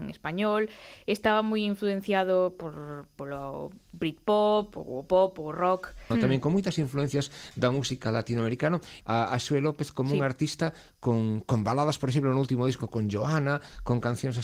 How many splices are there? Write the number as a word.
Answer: two